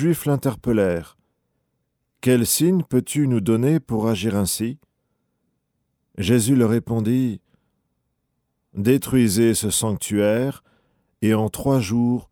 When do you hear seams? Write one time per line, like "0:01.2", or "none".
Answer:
none